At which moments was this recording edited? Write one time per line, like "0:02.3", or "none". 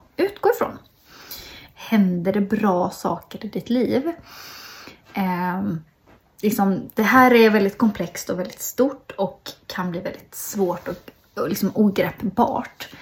0:01.7